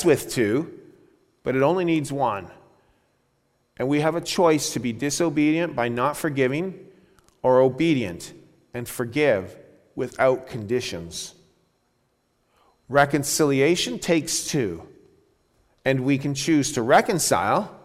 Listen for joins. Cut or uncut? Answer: uncut